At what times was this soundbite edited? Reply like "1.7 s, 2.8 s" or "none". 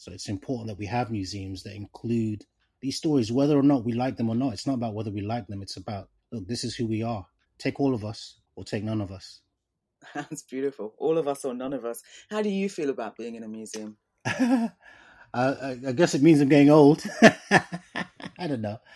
none

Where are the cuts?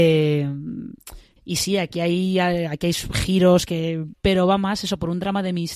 1.4 s, 4.1 s

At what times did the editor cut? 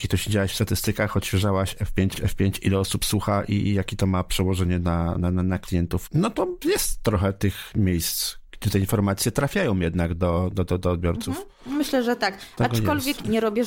2.1 s, 6.1 s

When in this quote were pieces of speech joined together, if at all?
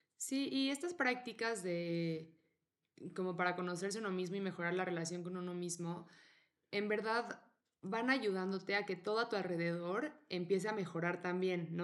none

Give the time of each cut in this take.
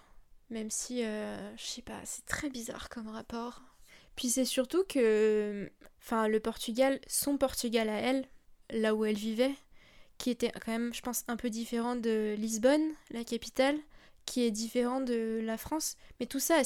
none

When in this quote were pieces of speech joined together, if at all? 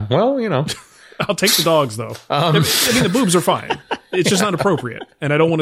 2.3 s

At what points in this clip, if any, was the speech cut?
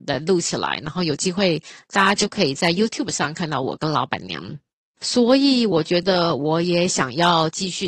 5.0 s

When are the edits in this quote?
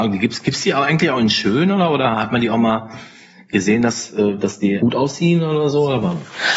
4.8 s

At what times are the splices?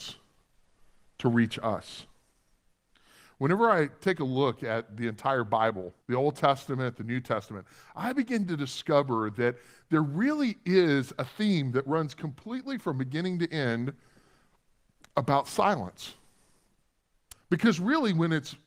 6.0 s, 17.3 s

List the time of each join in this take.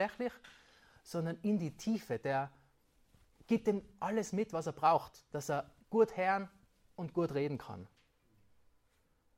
5.8 s

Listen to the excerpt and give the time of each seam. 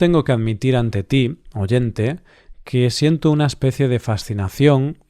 none

